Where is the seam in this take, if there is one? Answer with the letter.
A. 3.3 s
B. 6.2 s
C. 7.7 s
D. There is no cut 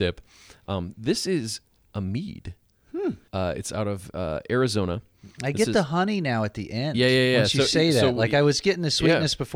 A